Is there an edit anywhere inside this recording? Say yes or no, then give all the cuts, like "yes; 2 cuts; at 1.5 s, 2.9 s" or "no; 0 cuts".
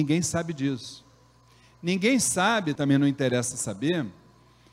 yes; 1 cut; at 2.8 s